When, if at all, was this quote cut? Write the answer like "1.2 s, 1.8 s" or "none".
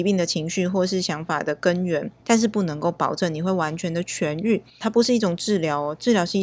2.2 s, 4.8 s

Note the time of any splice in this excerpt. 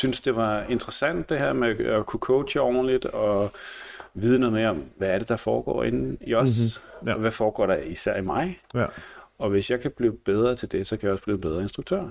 none

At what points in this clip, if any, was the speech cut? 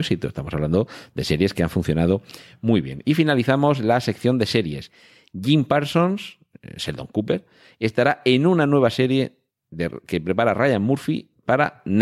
none

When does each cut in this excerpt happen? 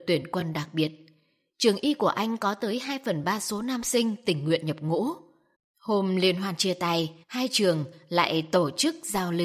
5.5 s, 7.2 s

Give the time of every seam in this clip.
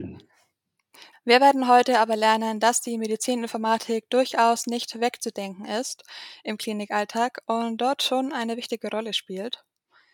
1.1 s

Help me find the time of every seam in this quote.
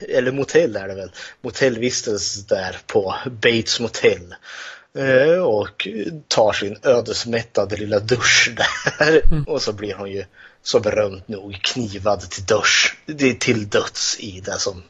9.4 s

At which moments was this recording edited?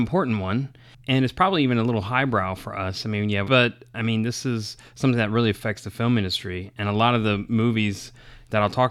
3.4 s

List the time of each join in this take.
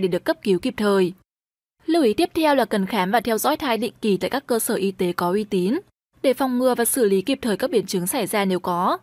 none

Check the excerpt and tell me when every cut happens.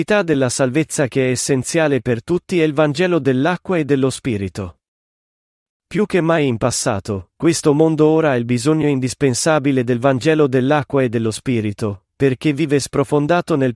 5.7 s

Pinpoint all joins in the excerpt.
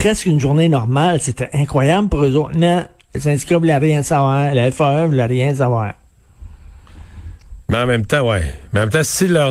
7.6 s

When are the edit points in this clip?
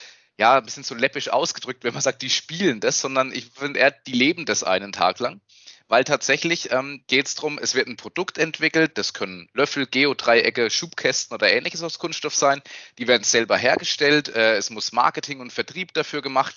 none

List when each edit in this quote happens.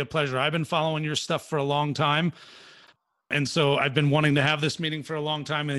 none

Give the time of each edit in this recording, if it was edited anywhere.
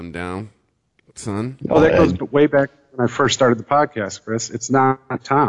none

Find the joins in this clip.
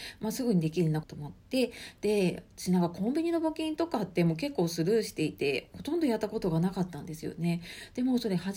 1.0 s

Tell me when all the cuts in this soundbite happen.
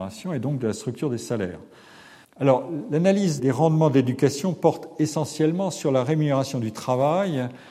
2.2 s, 3.4 s

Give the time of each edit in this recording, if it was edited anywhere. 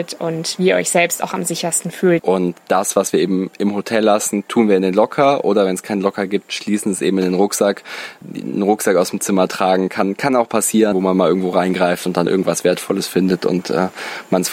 2.2 s, 10.9 s

